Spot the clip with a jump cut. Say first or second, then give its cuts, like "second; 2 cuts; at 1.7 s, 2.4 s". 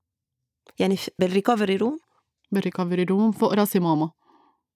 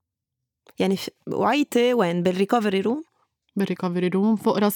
first; 1 cut; at 1.2 s